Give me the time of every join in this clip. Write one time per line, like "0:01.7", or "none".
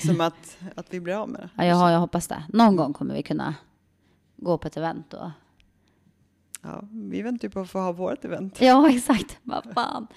none

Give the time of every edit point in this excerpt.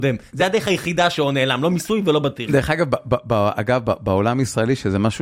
none

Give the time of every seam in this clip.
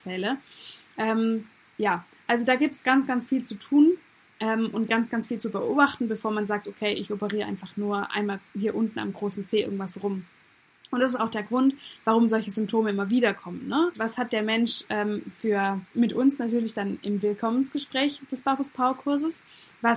0:13.9
0:15.9

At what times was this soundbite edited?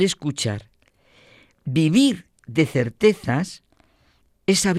none

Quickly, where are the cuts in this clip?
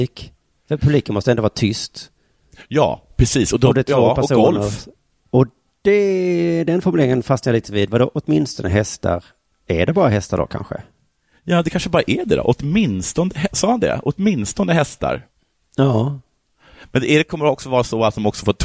0:05.2

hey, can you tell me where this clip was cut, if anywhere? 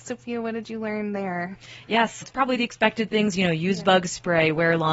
0:02.2

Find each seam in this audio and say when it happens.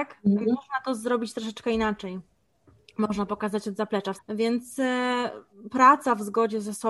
0:04.2

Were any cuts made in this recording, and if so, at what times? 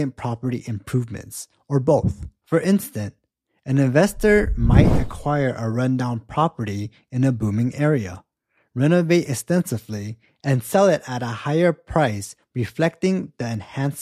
none

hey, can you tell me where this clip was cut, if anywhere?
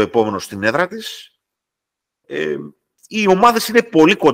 none

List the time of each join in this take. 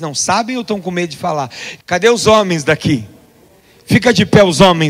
0:01.8

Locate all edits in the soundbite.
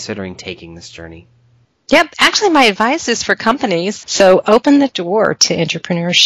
0:04.0

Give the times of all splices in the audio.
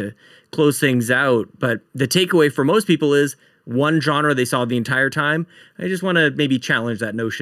none

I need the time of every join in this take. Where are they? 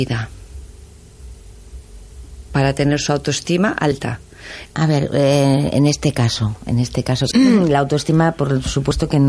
0:04.6
0:07.3

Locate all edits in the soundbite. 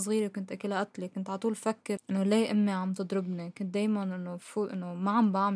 0:02.0

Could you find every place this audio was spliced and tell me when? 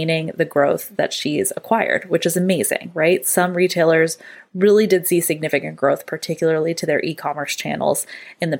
none

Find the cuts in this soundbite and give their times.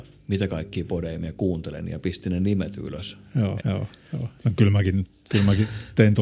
0:03.6

